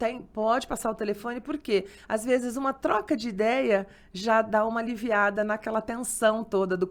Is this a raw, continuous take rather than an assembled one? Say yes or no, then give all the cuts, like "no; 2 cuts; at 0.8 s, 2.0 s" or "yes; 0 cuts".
yes; 0 cuts